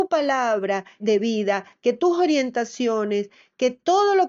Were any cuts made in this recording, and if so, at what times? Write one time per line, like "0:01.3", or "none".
0:01.0